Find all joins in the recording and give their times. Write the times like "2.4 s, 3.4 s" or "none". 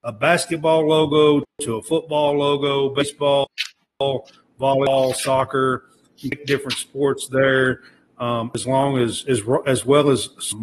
none